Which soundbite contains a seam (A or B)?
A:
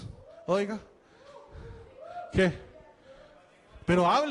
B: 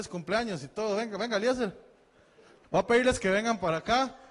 B